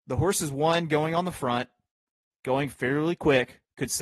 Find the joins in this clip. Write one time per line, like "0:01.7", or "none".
none